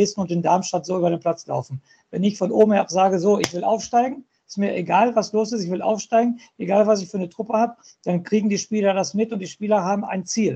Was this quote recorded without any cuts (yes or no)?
yes